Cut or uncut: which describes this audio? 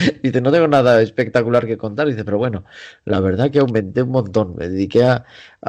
uncut